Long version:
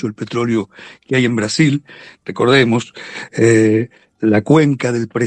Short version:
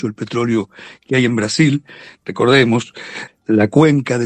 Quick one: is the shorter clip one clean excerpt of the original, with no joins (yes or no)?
no